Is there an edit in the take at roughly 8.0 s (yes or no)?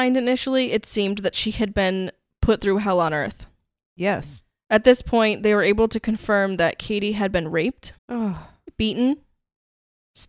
yes